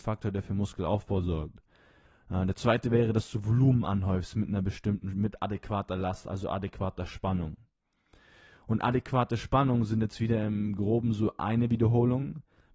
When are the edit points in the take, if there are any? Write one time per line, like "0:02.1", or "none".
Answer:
none